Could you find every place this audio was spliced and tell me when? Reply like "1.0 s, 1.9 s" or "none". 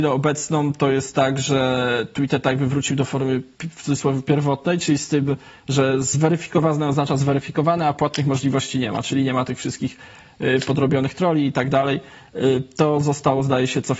none